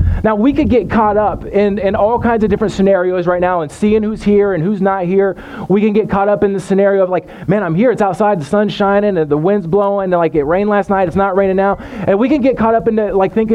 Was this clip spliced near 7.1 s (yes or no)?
no